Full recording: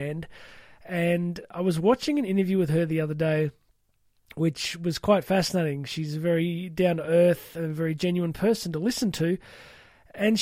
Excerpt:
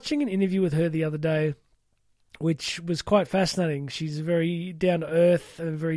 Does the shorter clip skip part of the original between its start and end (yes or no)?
no